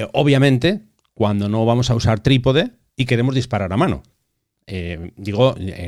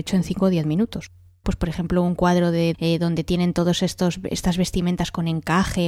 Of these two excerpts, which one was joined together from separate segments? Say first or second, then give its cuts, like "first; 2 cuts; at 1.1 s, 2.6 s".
second; 2 cuts; at 1.4 s, 2.7 s